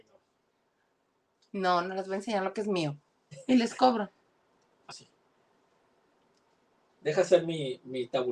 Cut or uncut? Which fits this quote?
cut